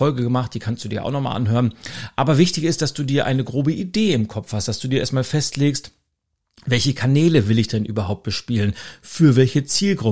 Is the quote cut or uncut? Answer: uncut